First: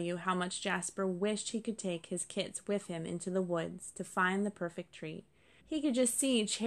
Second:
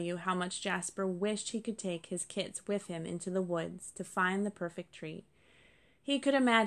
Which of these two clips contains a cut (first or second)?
first